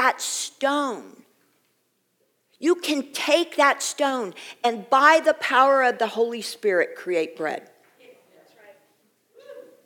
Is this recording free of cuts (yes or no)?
yes